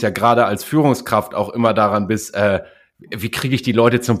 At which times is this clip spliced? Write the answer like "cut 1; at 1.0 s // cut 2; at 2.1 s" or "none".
none